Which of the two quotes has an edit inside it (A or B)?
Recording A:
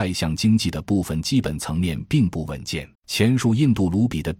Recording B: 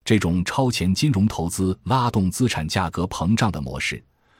A